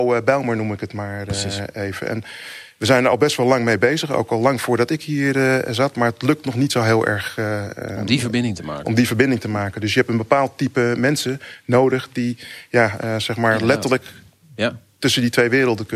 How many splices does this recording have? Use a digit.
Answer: 0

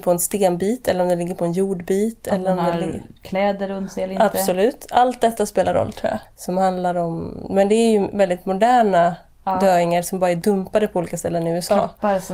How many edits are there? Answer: 1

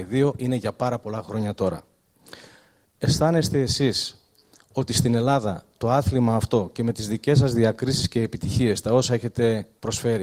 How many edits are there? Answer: 0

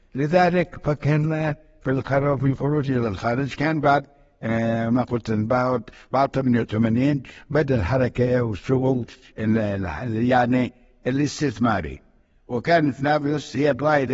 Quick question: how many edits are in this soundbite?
0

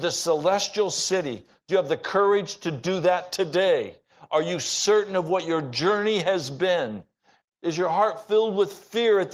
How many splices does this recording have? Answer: 1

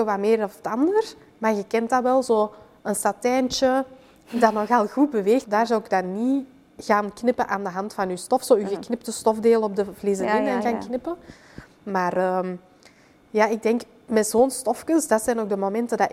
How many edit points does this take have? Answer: 1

